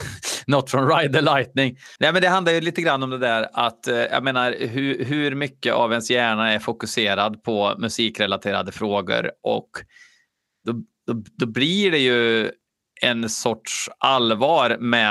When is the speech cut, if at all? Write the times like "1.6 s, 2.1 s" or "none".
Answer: 2.0 s